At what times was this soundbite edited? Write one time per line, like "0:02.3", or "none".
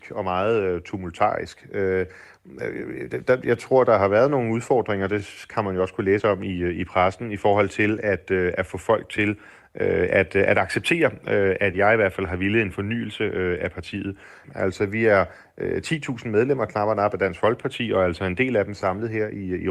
0:14.4